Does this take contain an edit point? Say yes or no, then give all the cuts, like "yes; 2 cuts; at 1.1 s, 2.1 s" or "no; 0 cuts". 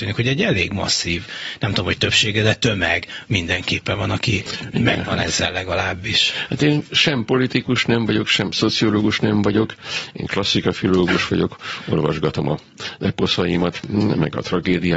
no; 0 cuts